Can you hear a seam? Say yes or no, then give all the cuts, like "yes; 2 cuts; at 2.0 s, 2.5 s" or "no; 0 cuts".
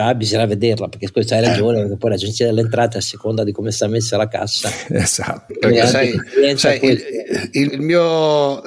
yes; 2 cuts; at 5.5 s, 7.7 s